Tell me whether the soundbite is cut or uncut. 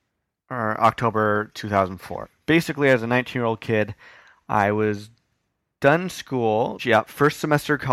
cut